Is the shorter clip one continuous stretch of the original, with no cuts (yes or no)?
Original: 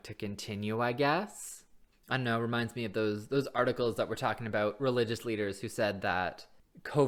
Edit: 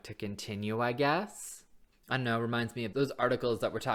no